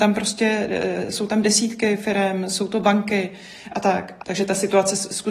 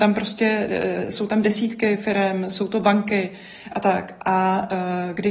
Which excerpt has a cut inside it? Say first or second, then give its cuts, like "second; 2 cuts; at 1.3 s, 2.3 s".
first; 1 cut; at 4.2 s